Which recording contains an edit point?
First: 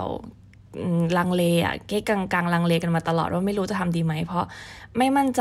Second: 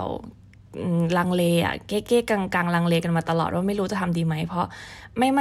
first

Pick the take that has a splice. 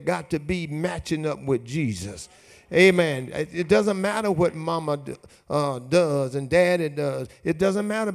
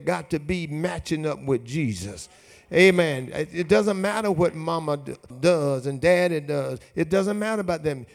second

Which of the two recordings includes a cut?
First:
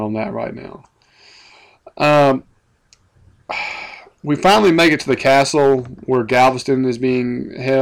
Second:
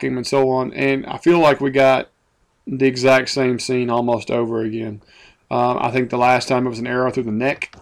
second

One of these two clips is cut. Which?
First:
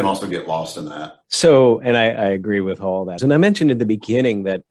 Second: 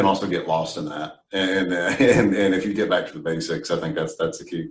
first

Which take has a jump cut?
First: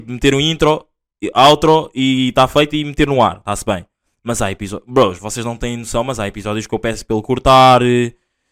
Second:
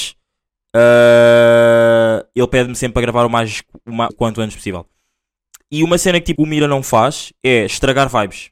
second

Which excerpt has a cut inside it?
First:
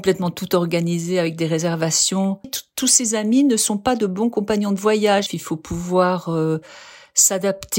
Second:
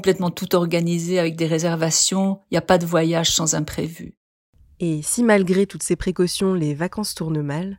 first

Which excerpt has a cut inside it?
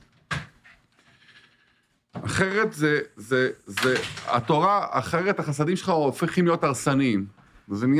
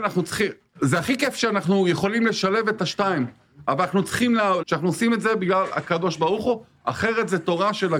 second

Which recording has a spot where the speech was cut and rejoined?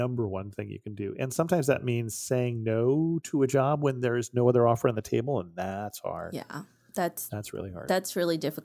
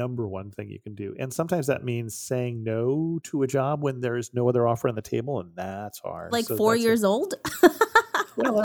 second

